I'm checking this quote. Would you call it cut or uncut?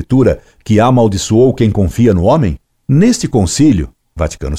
cut